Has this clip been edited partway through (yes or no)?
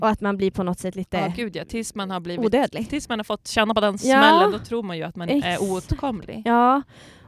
no